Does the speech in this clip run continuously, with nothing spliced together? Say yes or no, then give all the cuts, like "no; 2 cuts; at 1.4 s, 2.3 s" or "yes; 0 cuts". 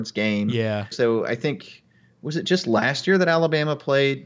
no; 1 cut; at 0.9 s